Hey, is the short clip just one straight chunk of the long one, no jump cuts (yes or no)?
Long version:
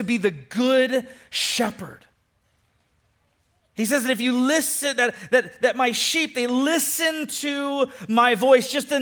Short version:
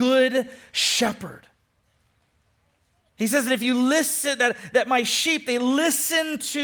no